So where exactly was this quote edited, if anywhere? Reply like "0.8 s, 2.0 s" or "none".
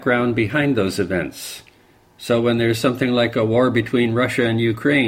none